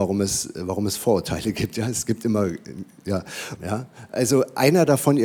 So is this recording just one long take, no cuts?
no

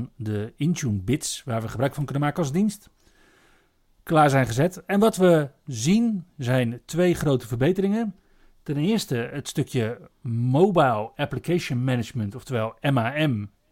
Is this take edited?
no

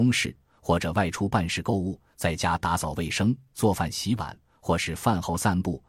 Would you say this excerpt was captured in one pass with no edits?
yes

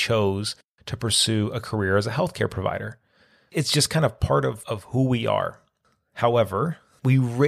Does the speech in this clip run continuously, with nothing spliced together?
yes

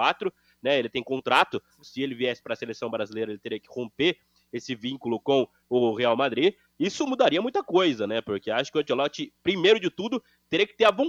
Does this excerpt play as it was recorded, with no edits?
no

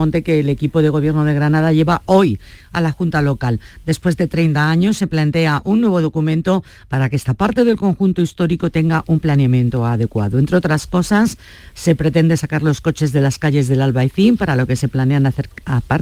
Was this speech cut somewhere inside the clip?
no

